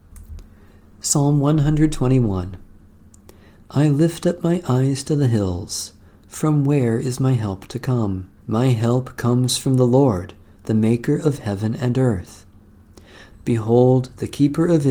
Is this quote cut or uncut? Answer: cut